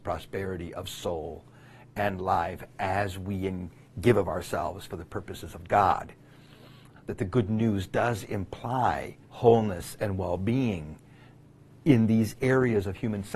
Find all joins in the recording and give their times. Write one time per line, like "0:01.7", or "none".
0:07.0
0:09.2